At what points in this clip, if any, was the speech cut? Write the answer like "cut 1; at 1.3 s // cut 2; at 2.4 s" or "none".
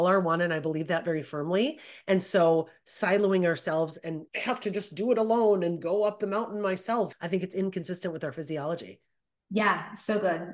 cut 1; at 4.3 s // cut 2; at 7.1 s

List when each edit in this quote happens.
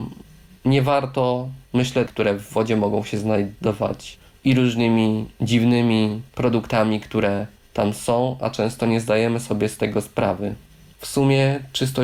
cut 1; at 2.1 s // cut 2; at 10.9 s

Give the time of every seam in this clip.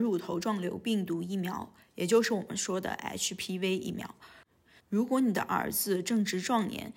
cut 1; at 4.8 s

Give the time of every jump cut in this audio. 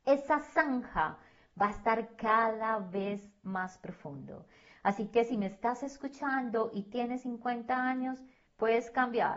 cut 1; at 8.5 s

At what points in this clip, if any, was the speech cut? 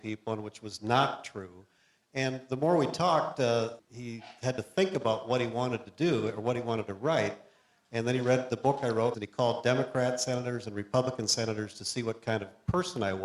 cut 1; at 3.8 s // cut 2; at 9.1 s

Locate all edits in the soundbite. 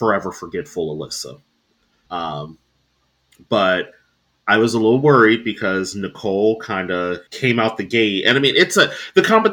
cut 1; at 2.1 s // cut 2; at 7.3 s

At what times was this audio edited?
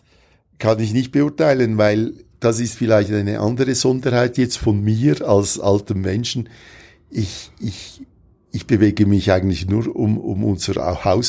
none

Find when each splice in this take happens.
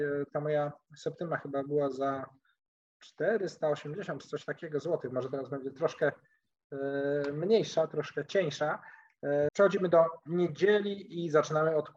cut 1; at 9.5 s

